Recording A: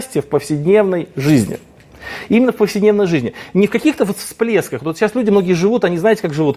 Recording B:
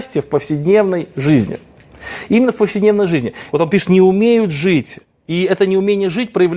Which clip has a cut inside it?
B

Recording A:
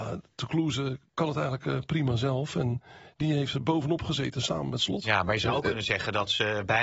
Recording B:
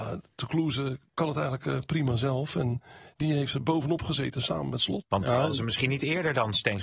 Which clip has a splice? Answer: B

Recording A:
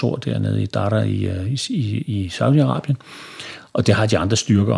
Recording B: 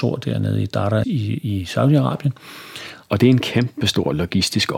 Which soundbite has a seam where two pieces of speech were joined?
B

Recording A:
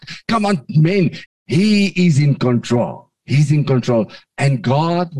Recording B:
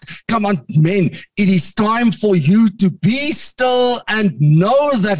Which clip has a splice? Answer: A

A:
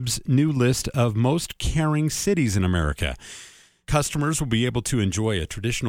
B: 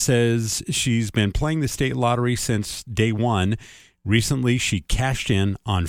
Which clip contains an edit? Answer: A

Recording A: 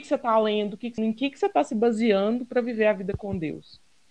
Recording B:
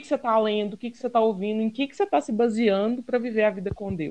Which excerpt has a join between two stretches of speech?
A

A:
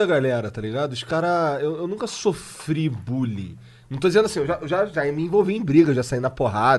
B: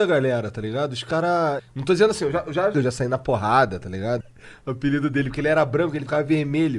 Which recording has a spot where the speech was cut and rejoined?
B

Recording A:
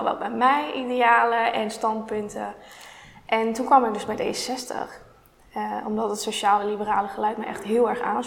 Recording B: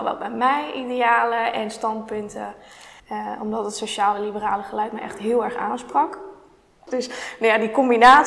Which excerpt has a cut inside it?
B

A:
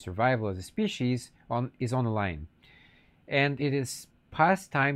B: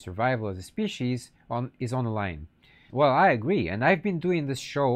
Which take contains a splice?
B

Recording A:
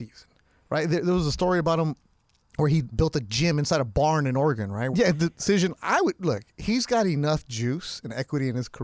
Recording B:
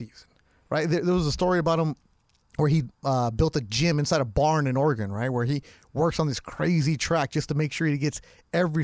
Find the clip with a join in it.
A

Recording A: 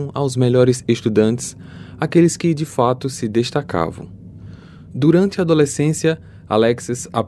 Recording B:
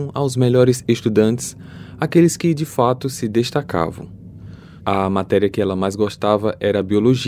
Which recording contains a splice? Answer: B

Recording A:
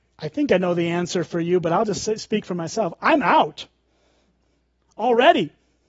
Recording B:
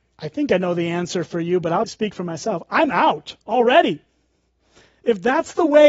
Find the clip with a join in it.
B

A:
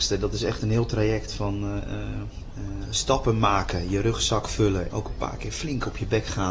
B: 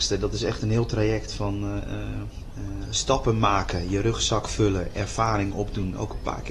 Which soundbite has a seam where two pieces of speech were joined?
A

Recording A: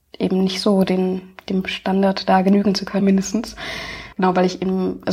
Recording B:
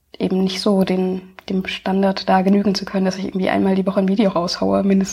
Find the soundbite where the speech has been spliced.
A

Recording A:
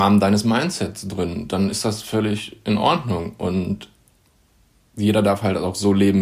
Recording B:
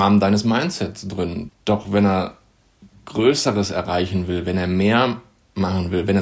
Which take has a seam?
B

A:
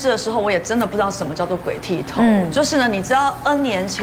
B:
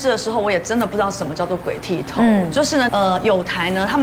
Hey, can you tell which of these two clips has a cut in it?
B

